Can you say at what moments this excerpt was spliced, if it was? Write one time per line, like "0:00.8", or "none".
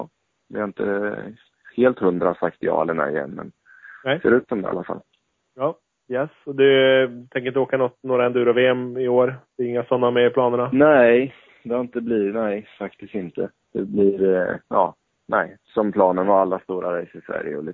none